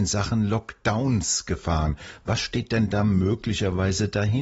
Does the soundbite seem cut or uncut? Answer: uncut